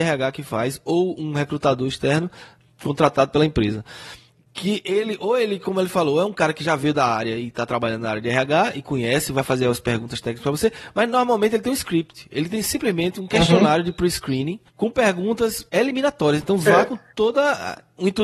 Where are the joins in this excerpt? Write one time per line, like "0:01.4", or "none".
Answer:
0:14.7
0:16.4